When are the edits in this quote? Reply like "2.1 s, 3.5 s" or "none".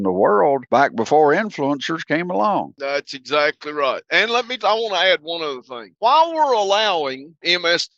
4.6 s